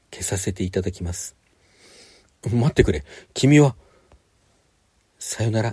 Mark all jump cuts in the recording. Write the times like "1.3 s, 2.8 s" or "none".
none